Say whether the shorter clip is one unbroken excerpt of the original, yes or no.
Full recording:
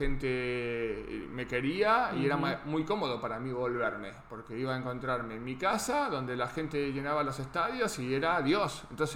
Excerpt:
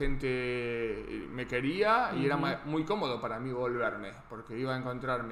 yes